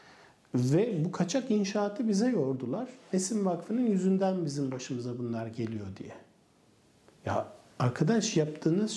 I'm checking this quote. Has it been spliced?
no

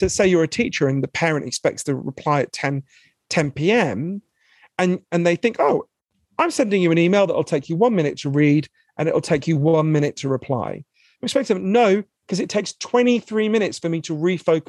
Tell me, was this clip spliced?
no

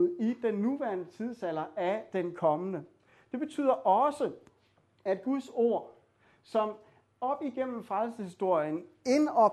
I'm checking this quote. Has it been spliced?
no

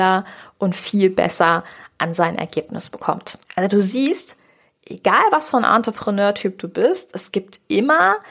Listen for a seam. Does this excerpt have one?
yes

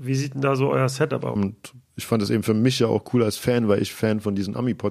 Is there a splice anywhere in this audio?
yes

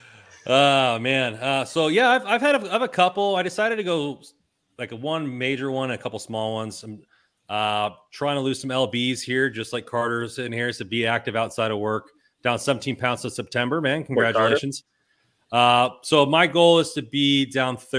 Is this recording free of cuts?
yes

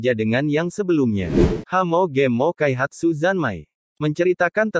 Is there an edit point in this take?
yes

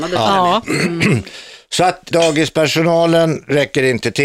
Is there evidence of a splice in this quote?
yes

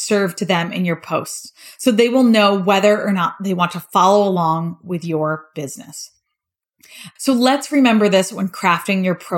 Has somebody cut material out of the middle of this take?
yes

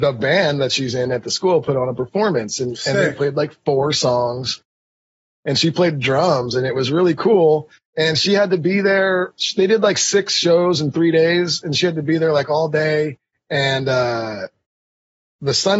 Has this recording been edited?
no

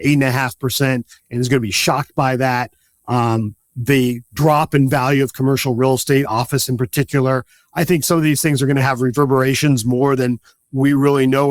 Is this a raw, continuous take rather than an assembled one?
yes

